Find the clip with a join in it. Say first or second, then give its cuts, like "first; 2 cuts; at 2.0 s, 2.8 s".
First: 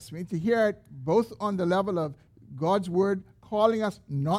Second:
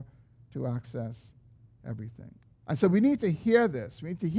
second; 1 cut; at 2.6 s